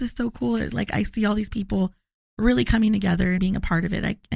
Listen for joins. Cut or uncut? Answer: cut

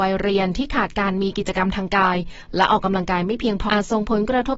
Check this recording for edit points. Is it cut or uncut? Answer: cut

